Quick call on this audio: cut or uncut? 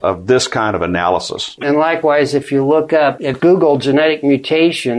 cut